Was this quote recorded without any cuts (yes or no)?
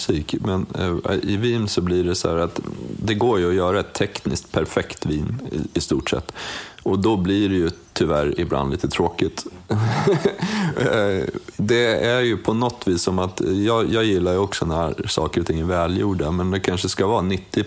yes